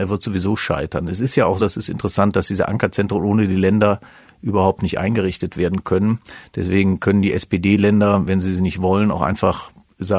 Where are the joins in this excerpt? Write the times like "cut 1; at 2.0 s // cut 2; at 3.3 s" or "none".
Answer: cut 1; at 1.6 s